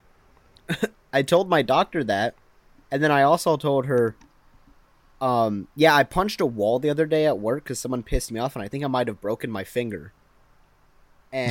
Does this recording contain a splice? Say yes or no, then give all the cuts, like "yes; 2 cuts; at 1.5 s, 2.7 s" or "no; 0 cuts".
no; 0 cuts